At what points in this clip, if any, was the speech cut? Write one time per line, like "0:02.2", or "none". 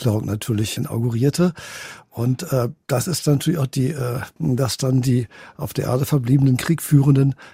0:04.4